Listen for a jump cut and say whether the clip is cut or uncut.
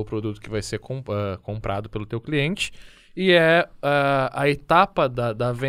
uncut